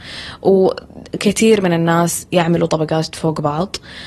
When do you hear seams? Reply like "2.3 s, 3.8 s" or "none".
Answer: 2.7 s